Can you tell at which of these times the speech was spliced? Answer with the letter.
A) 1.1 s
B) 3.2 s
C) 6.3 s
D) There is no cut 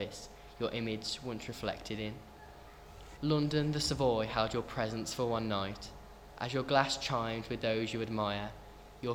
B